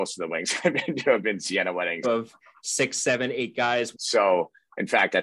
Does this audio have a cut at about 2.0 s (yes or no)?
yes